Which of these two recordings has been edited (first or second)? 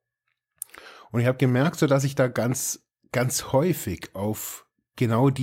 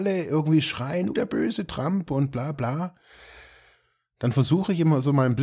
second